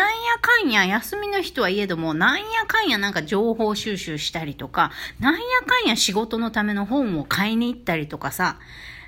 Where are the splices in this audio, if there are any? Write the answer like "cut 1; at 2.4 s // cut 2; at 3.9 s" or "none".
none